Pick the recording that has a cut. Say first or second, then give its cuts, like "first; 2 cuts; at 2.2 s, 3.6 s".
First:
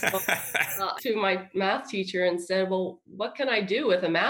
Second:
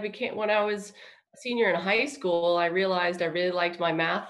first; 1 cut; at 1.0 s